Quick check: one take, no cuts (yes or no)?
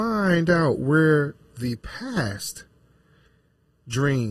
yes